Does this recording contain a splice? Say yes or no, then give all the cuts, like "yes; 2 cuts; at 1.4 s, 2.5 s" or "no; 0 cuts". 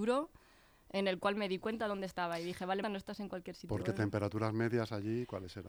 yes; 1 cut; at 2.8 s